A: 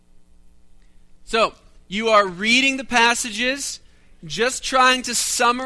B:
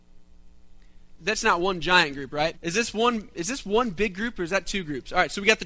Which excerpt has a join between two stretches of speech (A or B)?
B